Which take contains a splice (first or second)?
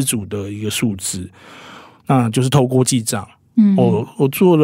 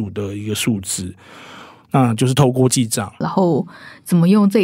second